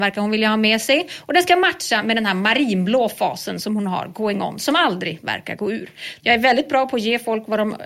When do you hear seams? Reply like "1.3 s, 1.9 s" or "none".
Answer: 6.2 s

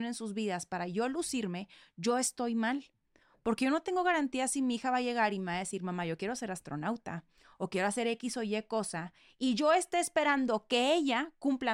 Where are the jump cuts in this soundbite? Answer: 7.5 s

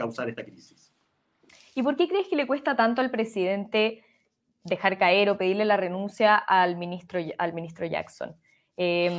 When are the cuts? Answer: none

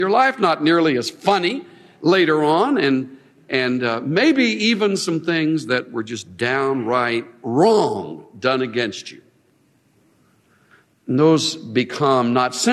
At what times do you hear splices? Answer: none

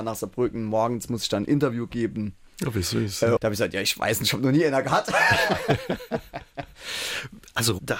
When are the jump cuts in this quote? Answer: 3.4 s

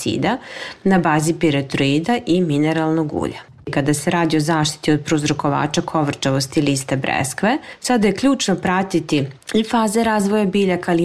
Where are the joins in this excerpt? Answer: 3.6 s

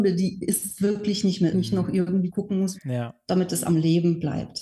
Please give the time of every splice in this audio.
1.5 s, 2.7 s

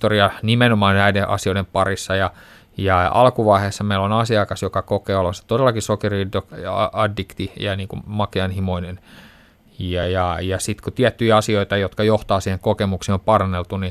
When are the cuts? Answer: none

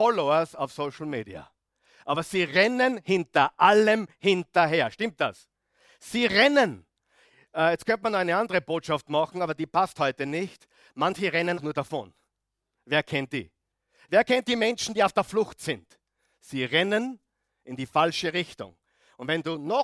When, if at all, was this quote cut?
11.6 s

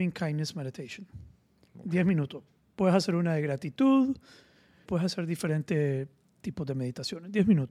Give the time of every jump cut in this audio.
4.8 s

